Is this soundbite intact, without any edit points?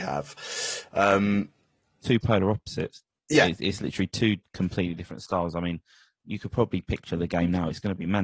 yes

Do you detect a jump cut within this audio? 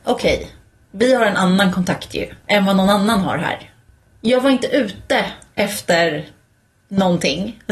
no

